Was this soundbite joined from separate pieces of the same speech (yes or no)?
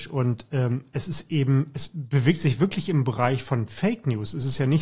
no